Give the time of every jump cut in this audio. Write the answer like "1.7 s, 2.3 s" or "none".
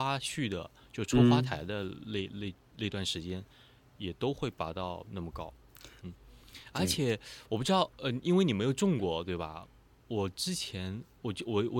6.0 s

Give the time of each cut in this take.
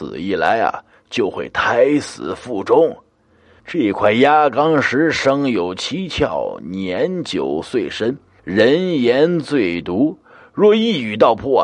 3.6 s, 8.4 s

